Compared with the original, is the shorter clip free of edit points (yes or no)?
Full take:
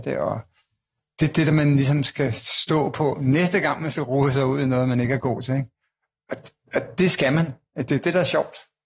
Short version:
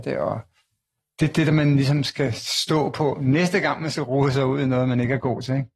yes